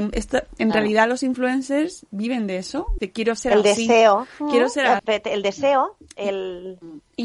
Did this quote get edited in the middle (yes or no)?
yes